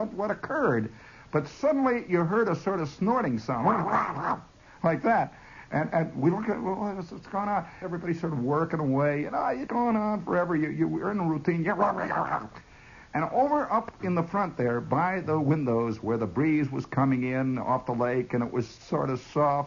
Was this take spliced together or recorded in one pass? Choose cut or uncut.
cut